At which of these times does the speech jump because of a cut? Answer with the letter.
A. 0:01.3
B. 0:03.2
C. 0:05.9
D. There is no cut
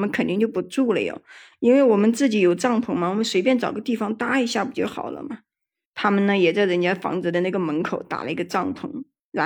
C